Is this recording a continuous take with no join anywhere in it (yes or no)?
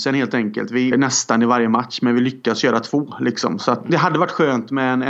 no